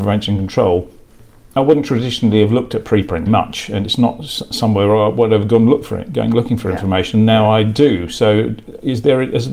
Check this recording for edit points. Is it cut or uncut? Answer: cut